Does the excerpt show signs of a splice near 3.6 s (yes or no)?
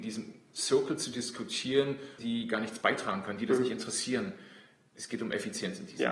no